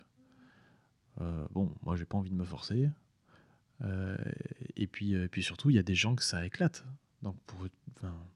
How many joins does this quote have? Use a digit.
0